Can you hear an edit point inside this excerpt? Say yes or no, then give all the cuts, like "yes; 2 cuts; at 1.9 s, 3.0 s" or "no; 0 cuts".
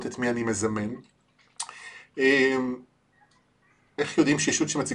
no; 0 cuts